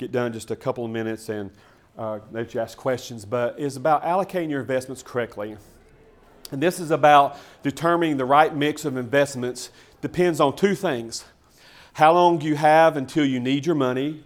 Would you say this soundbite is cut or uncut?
uncut